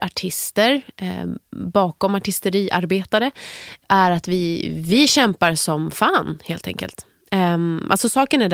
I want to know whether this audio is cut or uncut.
uncut